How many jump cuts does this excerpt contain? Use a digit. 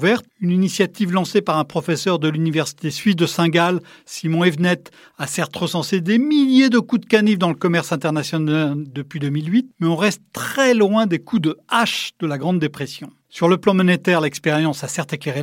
1